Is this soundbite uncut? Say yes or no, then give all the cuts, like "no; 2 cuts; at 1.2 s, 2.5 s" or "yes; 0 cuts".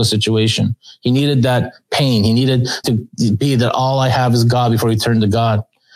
no; 1 cut; at 2.8 s